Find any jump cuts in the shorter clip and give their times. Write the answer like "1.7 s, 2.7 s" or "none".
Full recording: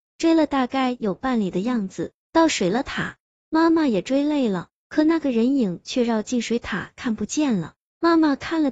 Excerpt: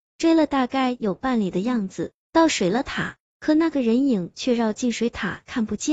3.3 s